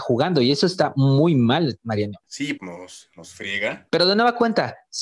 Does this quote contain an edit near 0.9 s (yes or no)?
no